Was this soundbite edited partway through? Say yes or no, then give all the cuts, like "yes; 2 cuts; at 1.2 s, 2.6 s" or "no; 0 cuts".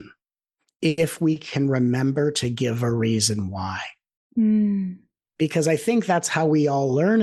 no; 0 cuts